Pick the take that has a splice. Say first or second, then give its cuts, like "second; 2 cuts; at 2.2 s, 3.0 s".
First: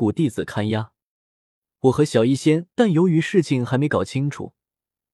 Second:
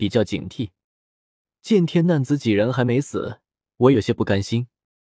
first; 1 cut; at 2.7 s